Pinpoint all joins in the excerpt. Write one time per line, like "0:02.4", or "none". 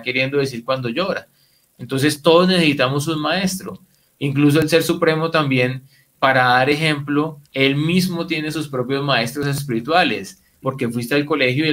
0:06.1
0:07.5
0:10.6